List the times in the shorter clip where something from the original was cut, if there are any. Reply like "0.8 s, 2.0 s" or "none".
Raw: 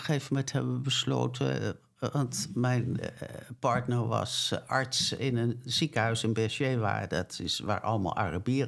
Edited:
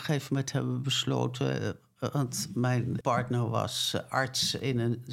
3.0 s